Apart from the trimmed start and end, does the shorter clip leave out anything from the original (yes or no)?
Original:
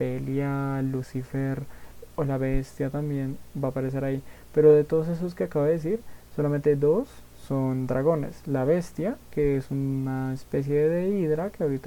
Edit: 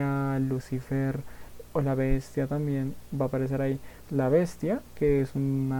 yes